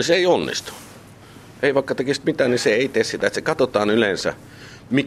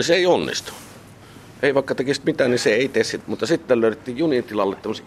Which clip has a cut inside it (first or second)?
second